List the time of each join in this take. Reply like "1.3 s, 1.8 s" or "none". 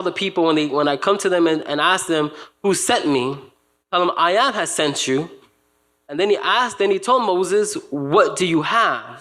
none